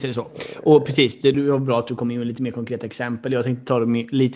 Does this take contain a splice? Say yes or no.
yes